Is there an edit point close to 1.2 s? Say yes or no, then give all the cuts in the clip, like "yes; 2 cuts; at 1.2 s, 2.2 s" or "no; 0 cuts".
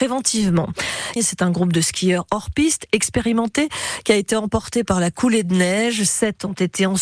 yes; 1 cut; at 1.2 s